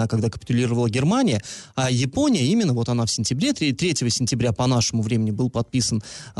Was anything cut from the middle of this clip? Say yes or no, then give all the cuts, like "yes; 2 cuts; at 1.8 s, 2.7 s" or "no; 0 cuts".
no; 0 cuts